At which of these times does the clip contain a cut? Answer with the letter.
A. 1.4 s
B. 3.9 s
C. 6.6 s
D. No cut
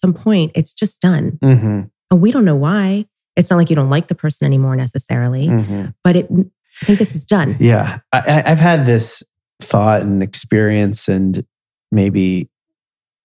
C